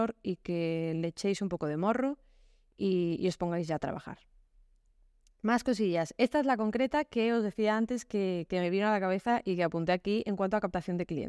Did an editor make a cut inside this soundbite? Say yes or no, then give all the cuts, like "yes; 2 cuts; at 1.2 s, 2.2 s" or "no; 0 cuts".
no; 0 cuts